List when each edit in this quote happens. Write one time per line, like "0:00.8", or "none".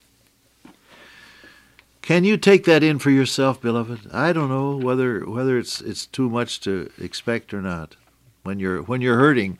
none